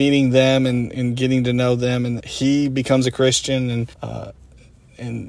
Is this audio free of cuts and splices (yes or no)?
no